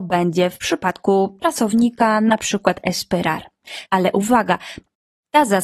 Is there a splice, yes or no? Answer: yes